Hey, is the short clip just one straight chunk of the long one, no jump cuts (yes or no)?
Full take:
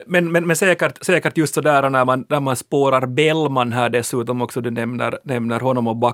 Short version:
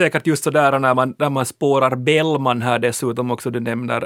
yes